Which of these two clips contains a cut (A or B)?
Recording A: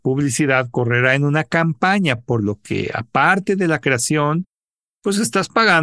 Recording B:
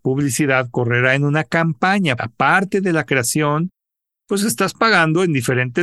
B